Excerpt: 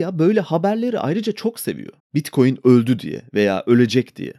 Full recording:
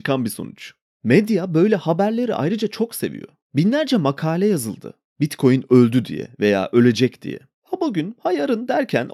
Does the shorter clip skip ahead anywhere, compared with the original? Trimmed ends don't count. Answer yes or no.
yes